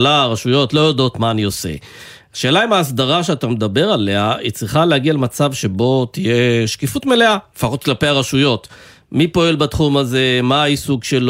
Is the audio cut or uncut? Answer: uncut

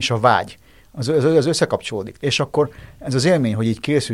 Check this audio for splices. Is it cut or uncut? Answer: cut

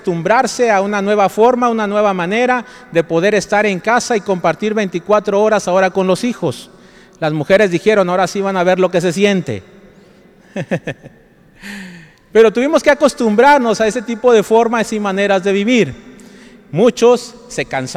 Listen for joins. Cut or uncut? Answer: uncut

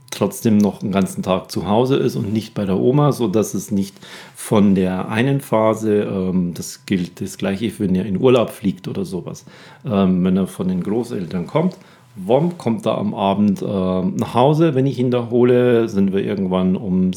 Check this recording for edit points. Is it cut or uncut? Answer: uncut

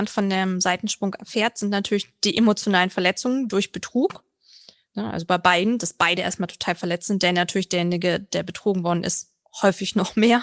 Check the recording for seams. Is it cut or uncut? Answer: uncut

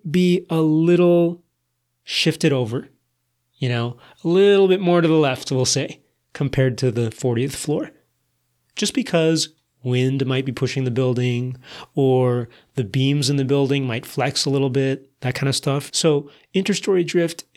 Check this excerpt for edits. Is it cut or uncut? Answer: cut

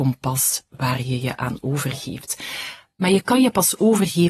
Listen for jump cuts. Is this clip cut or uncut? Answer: uncut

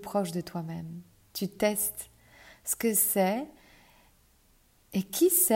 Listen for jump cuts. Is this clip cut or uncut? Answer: uncut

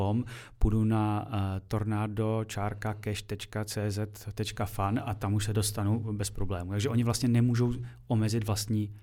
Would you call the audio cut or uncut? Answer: uncut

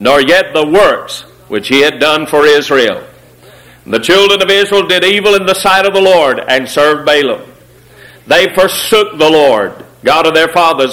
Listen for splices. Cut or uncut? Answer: uncut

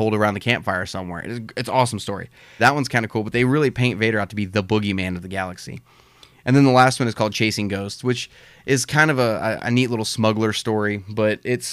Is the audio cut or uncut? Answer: cut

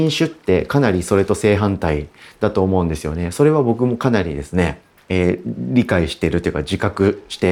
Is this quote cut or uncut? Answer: uncut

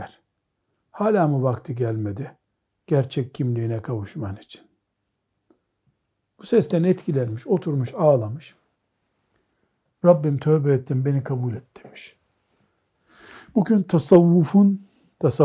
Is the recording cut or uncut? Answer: uncut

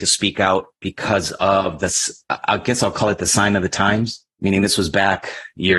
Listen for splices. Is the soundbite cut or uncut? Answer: cut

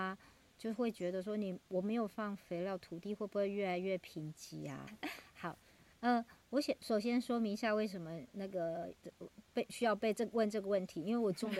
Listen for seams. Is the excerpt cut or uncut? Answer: cut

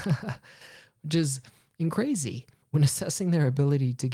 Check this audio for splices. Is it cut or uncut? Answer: cut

